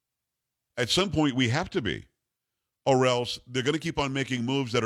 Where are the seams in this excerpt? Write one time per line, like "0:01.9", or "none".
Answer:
none